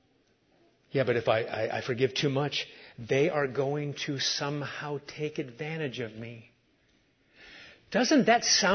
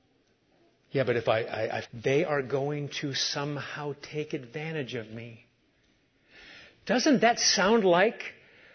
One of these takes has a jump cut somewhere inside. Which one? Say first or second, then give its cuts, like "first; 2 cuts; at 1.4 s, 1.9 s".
second; 1 cut; at 1.8 s